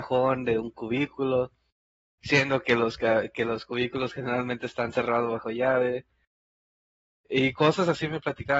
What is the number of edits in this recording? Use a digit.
0